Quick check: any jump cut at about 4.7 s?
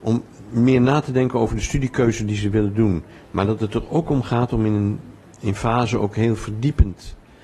no; 1 cut; at 3.2 s

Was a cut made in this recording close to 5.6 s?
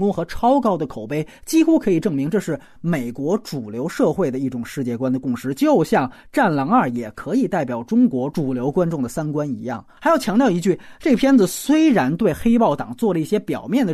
no; 1 cut; at 10.0 s

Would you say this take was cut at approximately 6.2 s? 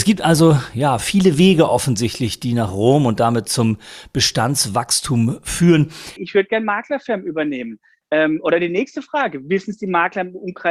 yes; 1 cut; at 6.2 s

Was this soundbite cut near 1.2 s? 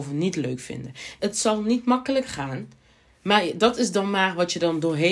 yes; 1 cut; at 1.2 s

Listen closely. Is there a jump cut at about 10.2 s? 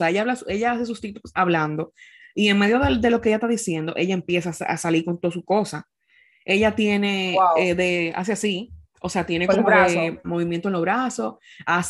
yes; 1 cut; at 10.2 s

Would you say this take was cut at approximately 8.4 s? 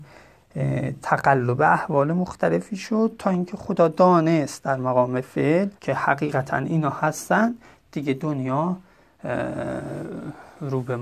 no; 1 cut; at 5.8 s

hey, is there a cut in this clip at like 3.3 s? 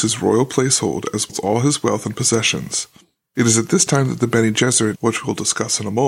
no; 2 cuts; at 1.3 s, 4.9 s

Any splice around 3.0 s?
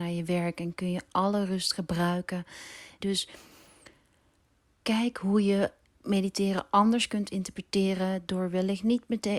yes; 1 cut; at 3.0 s

